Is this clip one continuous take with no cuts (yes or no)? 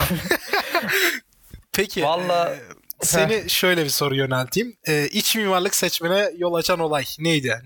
yes